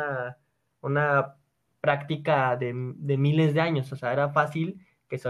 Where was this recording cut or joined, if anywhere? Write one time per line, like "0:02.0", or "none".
none